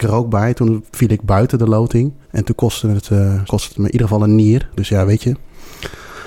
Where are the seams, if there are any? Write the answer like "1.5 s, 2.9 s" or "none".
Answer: 2.2 s, 3.5 s, 4.7 s